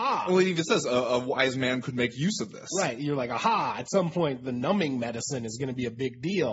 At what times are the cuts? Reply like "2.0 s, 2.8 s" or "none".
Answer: none